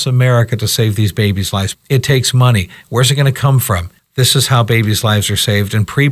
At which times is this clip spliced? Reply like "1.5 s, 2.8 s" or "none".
1.7 s, 4.0 s